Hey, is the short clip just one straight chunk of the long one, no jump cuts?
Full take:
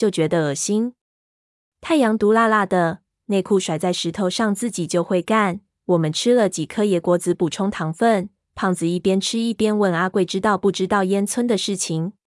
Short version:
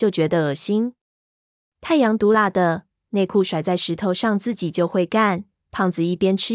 no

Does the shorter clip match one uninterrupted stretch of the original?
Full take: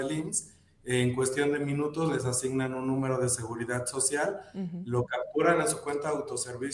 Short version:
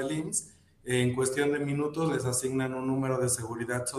yes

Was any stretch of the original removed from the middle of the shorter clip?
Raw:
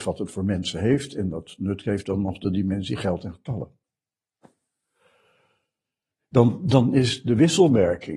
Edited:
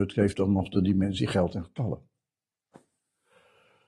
no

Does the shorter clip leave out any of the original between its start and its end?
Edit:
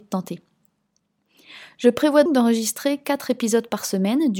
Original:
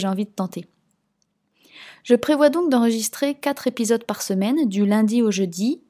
yes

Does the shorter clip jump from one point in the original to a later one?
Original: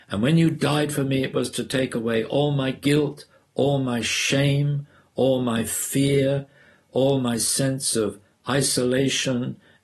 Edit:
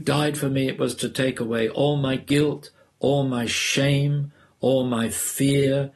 no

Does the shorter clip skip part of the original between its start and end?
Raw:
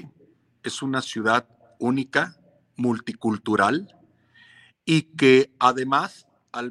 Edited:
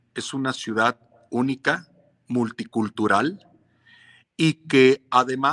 no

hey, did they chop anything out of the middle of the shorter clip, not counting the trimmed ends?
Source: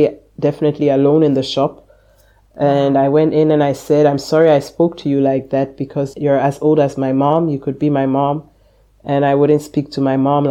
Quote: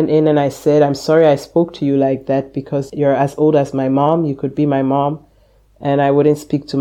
no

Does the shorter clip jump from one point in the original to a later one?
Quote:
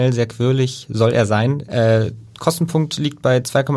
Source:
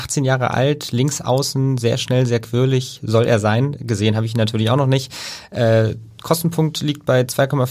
yes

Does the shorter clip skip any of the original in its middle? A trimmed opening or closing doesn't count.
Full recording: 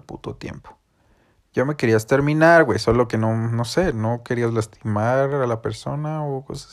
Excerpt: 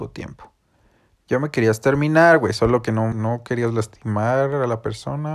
yes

